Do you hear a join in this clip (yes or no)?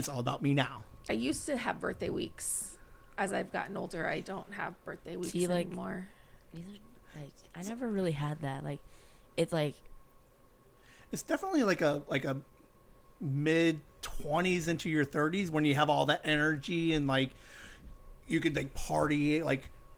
no